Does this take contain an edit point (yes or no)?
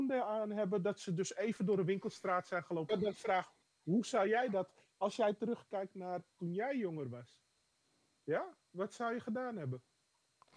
yes